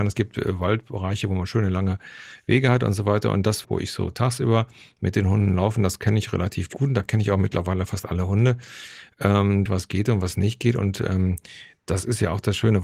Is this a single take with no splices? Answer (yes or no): no